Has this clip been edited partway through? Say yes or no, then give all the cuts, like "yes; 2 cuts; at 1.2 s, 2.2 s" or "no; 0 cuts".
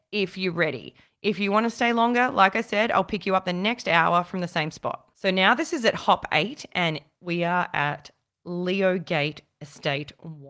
no; 0 cuts